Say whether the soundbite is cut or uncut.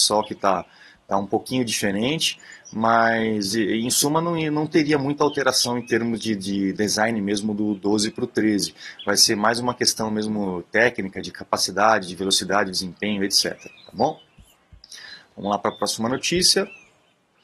uncut